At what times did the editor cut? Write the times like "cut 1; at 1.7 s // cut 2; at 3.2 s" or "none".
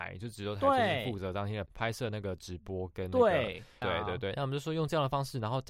cut 1; at 1.7 s // cut 2; at 3.8 s